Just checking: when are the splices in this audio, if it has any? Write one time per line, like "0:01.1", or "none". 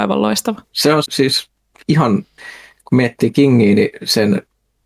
0:01.1